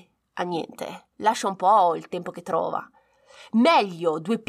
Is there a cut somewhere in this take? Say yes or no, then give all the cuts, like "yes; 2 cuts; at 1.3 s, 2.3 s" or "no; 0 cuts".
yes; 1 cut; at 1.1 s